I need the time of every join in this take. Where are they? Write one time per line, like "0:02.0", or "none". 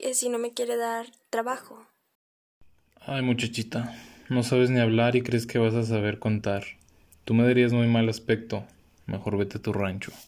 0:07.1